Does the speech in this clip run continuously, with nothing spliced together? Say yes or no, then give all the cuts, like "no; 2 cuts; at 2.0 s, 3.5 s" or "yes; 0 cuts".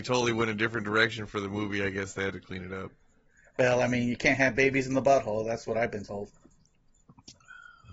yes; 0 cuts